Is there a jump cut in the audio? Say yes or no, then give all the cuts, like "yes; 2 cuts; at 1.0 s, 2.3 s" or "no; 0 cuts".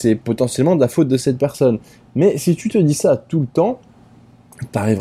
no; 0 cuts